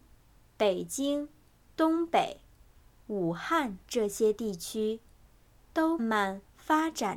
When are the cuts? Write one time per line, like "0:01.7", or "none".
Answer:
0:01.6
0:06.0